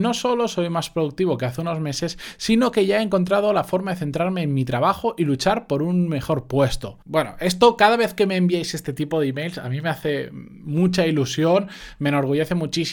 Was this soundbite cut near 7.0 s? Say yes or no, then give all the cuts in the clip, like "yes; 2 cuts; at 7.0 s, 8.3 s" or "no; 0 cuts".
yes; 1 cut; at 7.0 s